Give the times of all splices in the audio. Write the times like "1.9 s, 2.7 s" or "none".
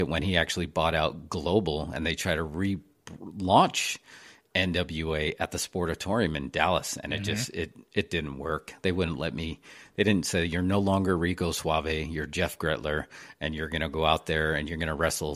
none